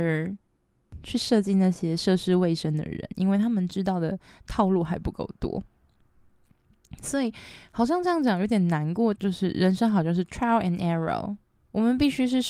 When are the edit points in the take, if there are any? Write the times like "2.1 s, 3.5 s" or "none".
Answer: 9.2 s